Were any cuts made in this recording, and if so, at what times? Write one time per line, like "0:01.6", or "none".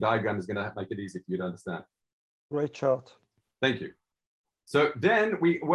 none